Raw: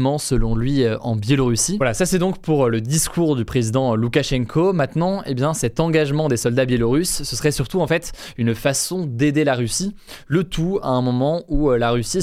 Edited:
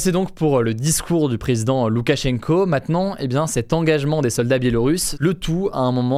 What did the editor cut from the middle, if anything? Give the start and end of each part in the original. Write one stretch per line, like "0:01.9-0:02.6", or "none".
0:07.2-0:10.2